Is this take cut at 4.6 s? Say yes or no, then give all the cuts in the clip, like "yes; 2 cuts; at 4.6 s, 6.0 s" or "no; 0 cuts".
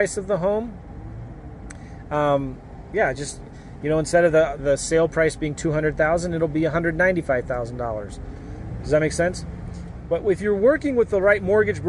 yes; 2 cuts; at 2.9 s, 4.6 s